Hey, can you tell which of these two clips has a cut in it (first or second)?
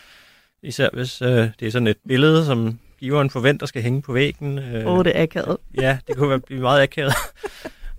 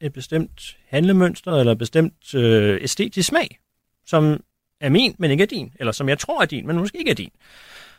second